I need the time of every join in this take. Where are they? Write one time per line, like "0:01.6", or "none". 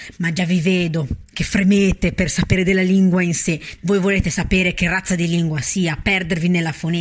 0:03.8